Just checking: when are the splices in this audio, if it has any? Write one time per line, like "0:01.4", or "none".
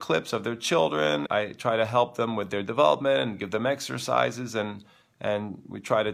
0:01.3